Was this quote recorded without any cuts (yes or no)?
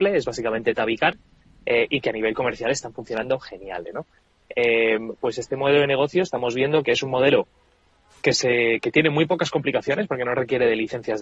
no